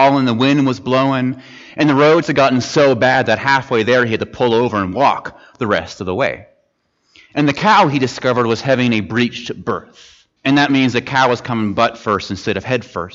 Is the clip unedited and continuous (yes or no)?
no